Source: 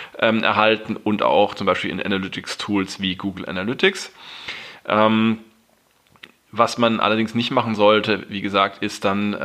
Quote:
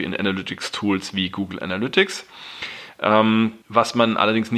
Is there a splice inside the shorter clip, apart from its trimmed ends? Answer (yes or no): yes